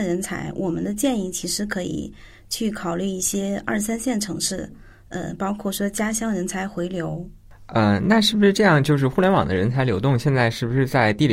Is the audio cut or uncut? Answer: uncut